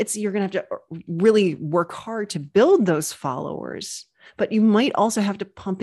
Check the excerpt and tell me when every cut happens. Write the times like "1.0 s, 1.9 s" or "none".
none